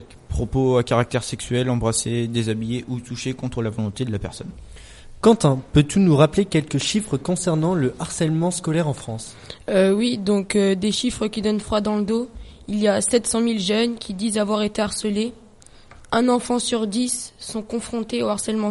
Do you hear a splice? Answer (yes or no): no